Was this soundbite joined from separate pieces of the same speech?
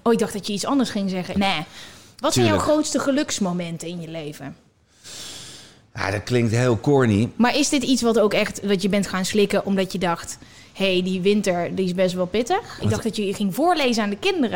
yes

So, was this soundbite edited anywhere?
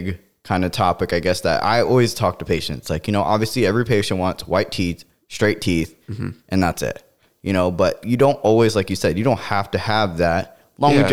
no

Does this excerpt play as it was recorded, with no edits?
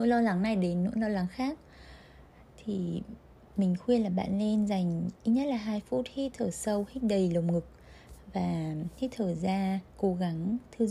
no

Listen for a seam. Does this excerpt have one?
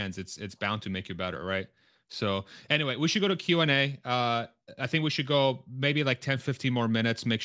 no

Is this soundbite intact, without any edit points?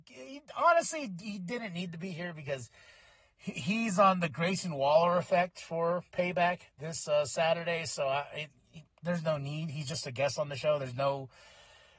yes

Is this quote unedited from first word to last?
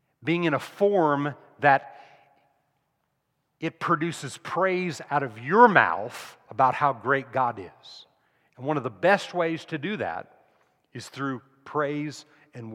yes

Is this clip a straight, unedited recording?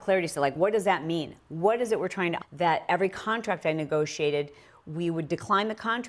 no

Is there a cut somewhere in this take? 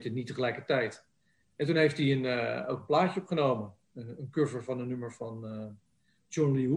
no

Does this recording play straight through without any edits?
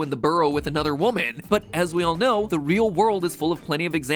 no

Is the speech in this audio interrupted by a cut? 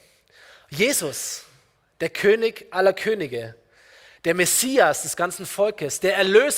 no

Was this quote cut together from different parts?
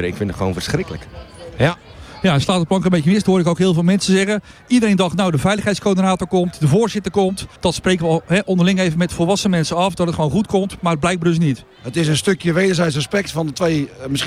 yes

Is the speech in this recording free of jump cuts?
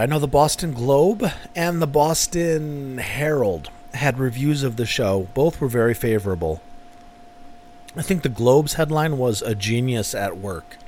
yes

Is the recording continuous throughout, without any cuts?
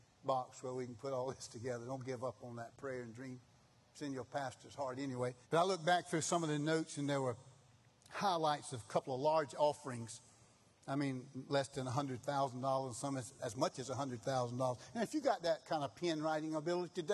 no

